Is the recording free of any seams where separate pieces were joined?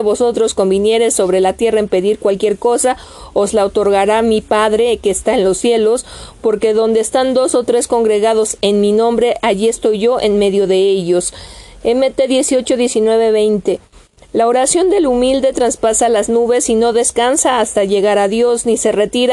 yes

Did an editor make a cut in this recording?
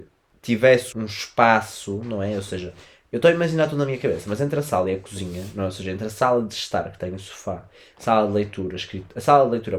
yes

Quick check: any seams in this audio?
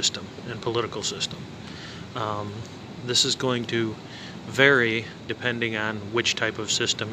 yes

